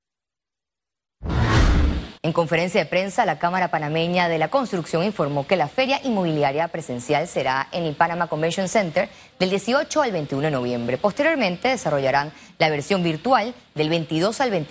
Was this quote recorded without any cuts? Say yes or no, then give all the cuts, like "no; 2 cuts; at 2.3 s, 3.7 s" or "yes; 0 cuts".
no; 1 cut; at 2.2 s